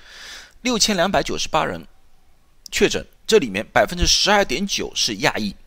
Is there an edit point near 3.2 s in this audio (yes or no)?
yes